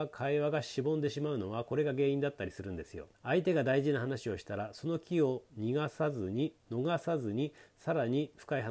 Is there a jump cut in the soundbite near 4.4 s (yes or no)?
no